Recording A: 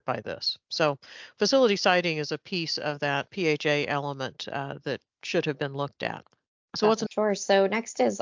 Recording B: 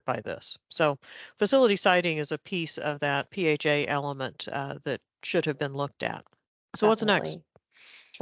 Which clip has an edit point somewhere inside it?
A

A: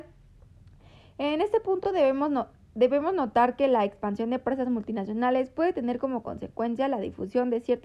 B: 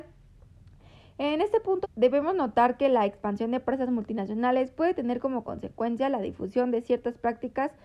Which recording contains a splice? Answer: B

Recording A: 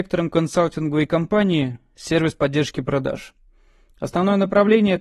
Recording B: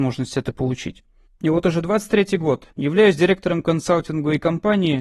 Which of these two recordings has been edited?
B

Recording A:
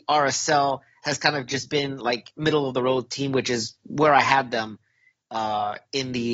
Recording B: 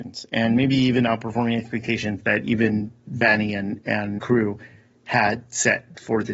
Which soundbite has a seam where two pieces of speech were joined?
B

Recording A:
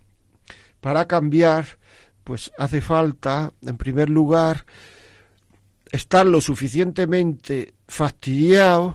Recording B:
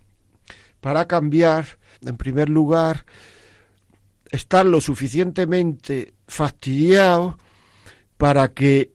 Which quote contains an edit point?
B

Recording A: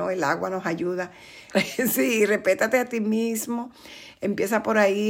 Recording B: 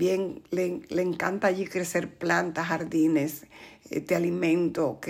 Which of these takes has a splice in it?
A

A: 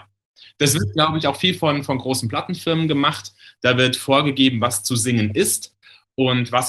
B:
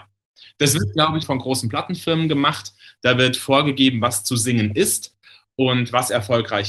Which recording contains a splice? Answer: B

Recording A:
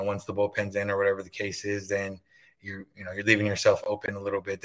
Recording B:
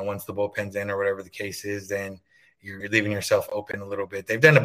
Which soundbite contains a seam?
B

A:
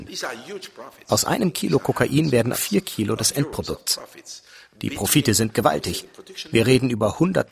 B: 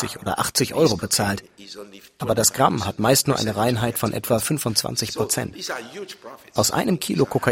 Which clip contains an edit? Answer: A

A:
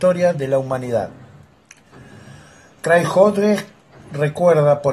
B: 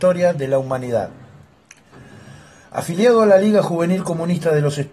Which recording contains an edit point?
B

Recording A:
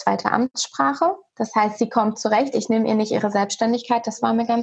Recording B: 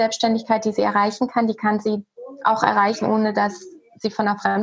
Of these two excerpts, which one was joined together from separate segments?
A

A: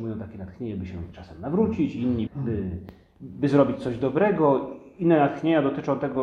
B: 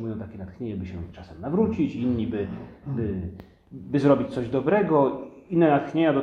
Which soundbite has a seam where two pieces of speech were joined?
A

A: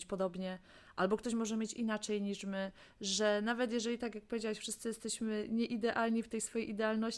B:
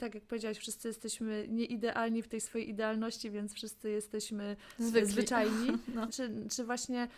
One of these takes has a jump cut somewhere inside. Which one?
B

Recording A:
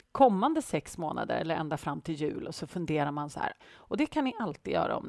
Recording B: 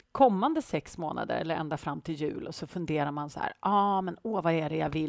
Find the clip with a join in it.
A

